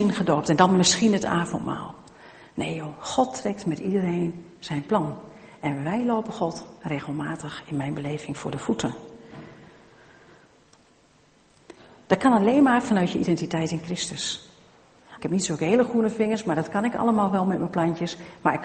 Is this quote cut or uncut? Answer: cut